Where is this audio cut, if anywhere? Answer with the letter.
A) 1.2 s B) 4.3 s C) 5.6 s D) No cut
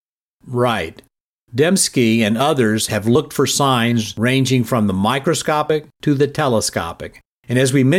D